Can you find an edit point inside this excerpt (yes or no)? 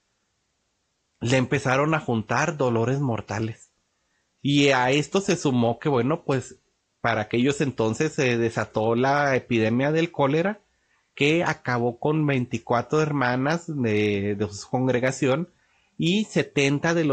no